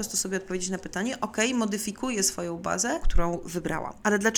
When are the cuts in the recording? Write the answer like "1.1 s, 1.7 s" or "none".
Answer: 3.0 s